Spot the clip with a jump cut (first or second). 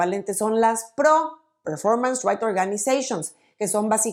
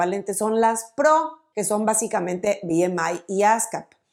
second